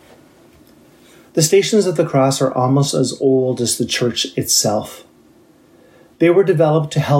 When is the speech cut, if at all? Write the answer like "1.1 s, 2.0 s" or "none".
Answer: none